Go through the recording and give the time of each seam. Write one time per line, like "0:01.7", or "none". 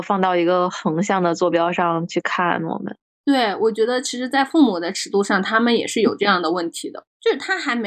none